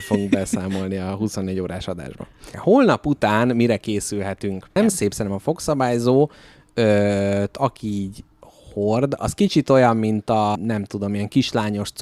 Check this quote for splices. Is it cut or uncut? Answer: cut